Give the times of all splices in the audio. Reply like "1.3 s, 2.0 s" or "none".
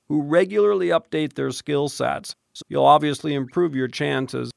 2.6 s